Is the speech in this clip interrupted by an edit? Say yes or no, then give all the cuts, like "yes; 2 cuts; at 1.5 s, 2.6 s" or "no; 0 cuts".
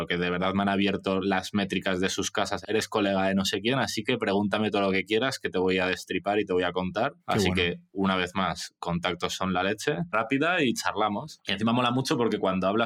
yes; 3 cuts; at 2.6 s, 7.2 s, 10.1 s